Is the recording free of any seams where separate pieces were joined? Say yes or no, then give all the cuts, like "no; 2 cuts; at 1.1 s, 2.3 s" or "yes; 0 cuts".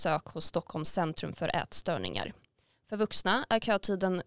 yes; 0 cuts